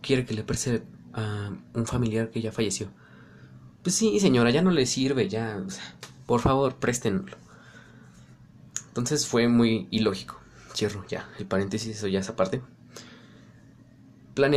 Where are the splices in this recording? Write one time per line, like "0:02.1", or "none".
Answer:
none